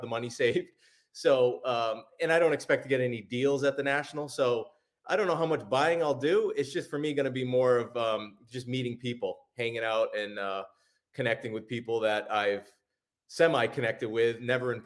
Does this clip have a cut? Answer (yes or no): no